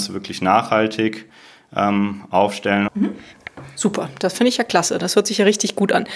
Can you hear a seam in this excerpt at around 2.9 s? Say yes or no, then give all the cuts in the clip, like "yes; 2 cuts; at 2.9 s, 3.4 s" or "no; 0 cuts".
yes; 1 cut; at 2.9 s